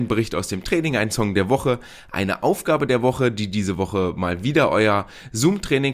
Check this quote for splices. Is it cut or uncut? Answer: uncut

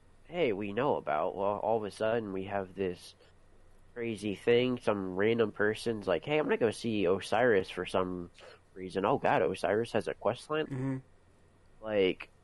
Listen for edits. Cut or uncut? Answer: cut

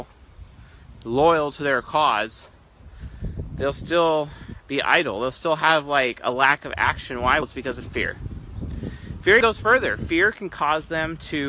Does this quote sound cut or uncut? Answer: cut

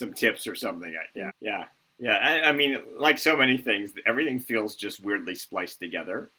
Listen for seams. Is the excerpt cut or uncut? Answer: cut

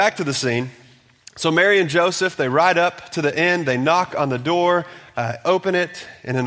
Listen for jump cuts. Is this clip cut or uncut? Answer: uncut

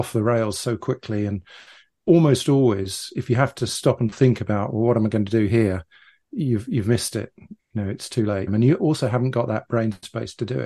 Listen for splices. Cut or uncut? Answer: cut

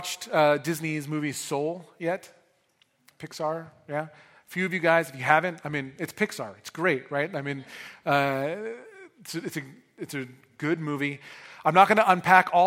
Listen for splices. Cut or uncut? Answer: uncut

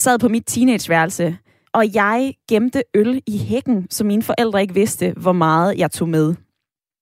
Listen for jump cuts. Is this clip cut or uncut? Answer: cut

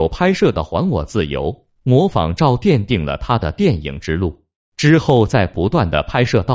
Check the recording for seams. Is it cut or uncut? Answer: uncut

